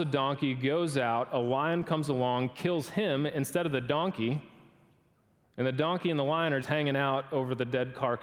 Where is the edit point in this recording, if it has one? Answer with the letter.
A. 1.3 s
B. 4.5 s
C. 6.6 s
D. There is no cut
C